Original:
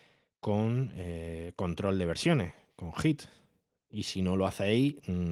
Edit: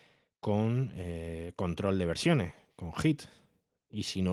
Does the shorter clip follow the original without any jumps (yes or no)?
yes